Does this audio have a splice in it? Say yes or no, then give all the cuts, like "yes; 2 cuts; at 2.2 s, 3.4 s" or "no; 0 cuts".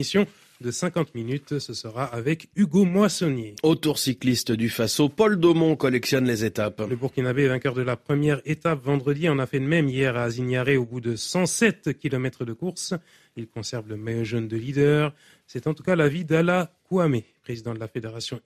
yes; 1 cut; at 15.4 s